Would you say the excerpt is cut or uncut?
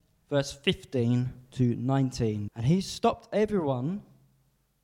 cut